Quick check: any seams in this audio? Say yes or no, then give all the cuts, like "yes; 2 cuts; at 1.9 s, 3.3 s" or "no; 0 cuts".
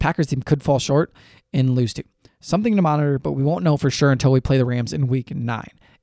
no; 0 cuts